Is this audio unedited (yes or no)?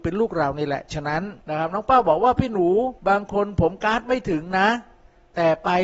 no